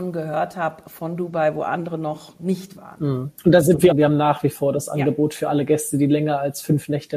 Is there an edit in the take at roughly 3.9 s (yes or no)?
yes